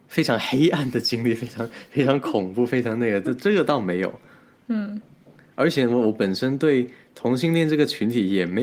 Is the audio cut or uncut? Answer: uncut